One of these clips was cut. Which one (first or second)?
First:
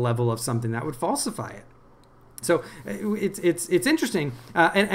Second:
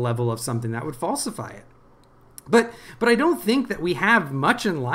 first